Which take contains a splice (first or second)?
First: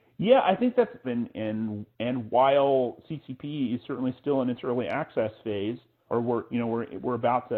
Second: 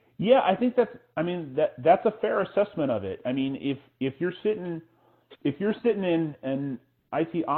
first